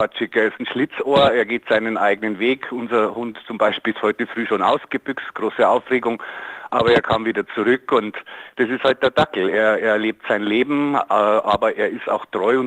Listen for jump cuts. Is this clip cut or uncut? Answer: uncut